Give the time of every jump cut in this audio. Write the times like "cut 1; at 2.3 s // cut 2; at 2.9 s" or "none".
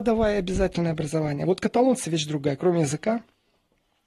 none